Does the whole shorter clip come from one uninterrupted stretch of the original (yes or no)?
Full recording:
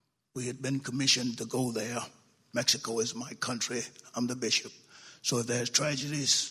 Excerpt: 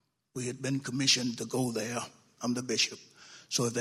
no